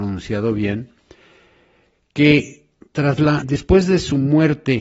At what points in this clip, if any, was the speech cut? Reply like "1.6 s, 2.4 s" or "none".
3.4 s